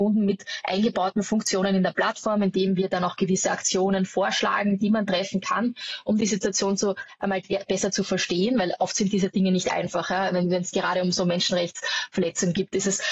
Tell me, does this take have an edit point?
no; 0 cuts

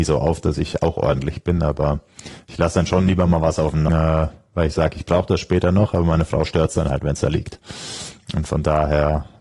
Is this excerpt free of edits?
no; 1 cut; at 3.9 s

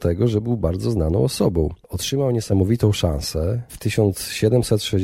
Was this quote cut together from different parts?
yes; 1 cut; at 1.8 s

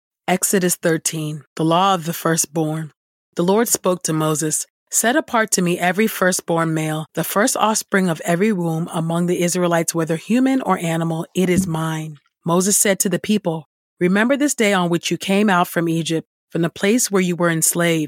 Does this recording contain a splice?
no; 0 cuts

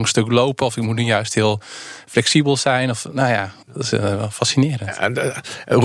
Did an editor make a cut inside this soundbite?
yes; 1 cut; at 3.6 s

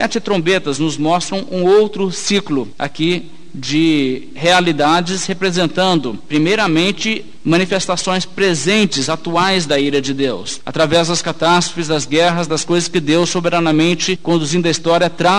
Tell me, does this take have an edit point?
no; 0 cuts

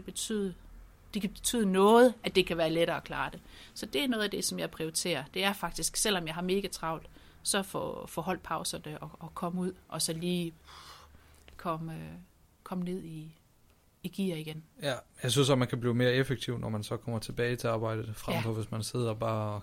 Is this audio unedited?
yes; 0 cuts

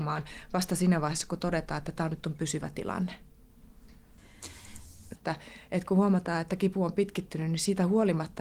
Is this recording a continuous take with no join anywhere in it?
no; 1 cut; at 5.1 s

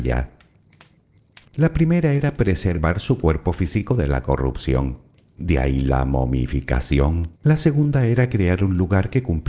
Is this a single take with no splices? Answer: no; 2 cuts; at 1.4 s, 7.3 s

